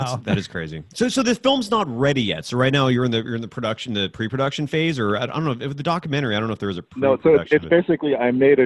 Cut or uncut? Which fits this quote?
uncut